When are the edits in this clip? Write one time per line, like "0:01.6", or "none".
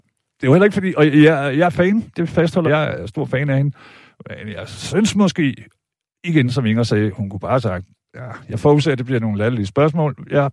0:02.7